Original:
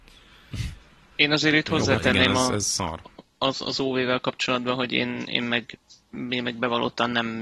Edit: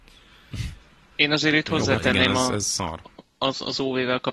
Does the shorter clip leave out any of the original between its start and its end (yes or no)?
no